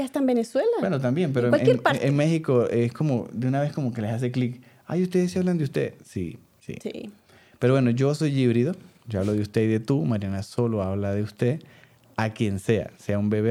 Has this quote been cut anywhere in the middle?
no; 0 cuts

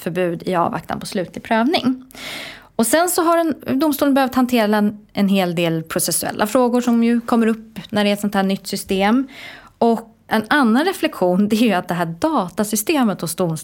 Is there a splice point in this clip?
yes; 1 cut; at 10.3 s

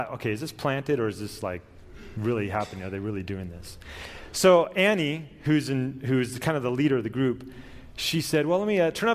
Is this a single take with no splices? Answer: yes; 0 cuts

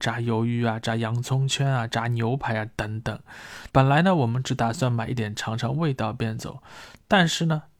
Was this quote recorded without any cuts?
no; 2 cuts; at 3.7 s, 5.2 s

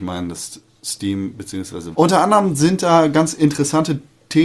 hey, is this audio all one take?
no; 1 cut; at 1.9 s

